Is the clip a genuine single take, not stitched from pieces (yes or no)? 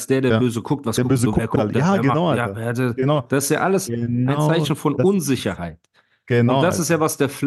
yes